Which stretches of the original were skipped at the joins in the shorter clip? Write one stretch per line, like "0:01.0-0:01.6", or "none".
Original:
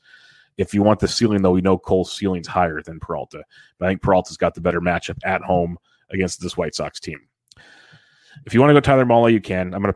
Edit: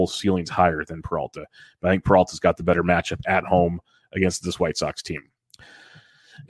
none